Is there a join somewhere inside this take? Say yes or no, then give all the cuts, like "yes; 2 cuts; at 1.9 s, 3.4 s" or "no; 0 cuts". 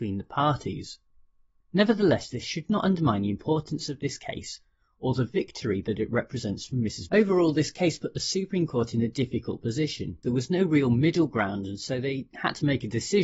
yes; 3 cuts; at 1.6 s, 7.1 s, 10.2 s